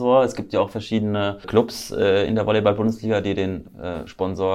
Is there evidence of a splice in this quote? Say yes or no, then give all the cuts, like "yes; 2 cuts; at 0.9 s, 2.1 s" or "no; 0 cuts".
yes; 1 cut; at 1.4 s